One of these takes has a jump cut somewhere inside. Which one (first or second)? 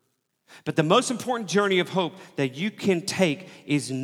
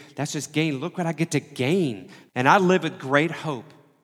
second